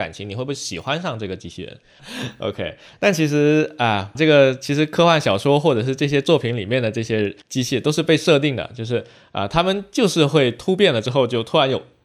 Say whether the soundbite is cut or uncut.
cut